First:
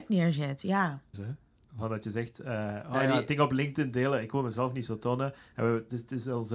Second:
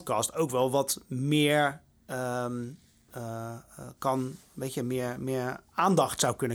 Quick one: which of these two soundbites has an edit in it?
first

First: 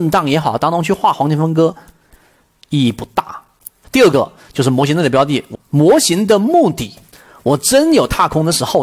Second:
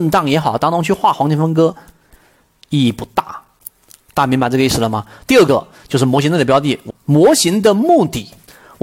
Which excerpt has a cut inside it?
first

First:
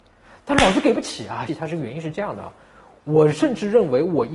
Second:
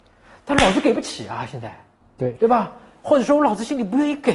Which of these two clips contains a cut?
first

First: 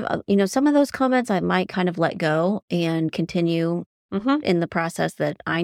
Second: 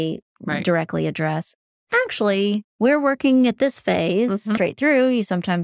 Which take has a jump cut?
second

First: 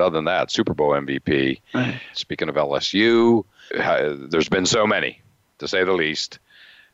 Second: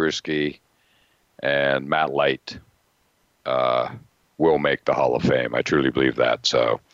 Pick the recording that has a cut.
first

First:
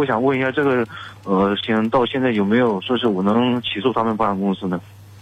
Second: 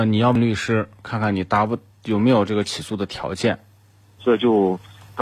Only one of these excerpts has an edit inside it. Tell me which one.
second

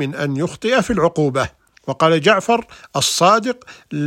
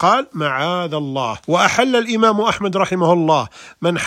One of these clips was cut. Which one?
second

